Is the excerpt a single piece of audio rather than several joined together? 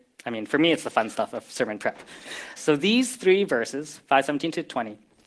no; 1 cut; at 2.6 s

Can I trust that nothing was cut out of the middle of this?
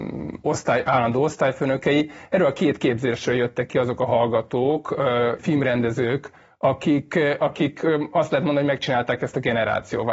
no; 1 cut; at 5.4 s

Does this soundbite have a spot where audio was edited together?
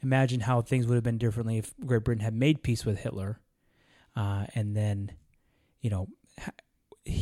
no; 0 cuts

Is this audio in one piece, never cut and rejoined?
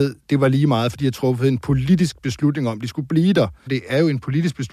no; 1 cut; at 3.7 s

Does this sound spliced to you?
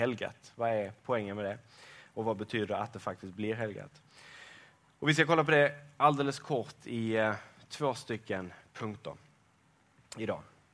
no; 0 cuts

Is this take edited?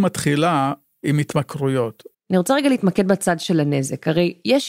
yes; 1 cut; at 2.1 s

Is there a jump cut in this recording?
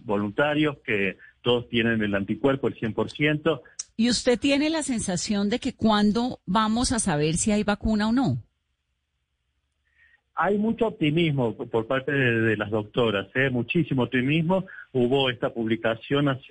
yes; 1 cut; at 3.9 s

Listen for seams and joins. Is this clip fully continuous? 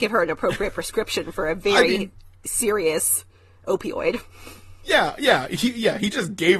yes; 0 cuts

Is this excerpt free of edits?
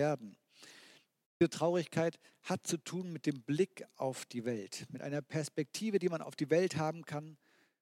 yes; 0 cuts

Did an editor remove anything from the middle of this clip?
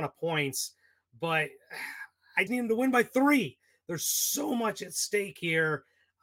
yes; 1 cut; at 2.5 s

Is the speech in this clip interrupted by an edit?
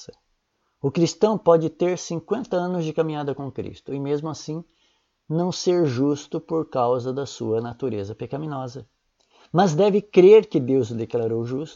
no; 0 cuts

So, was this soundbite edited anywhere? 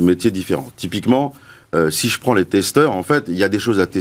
no; 0 cuts

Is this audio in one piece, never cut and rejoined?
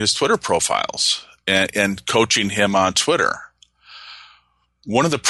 yes; 0 cuts

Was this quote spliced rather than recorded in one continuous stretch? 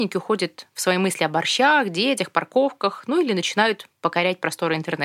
no; 0 cuts

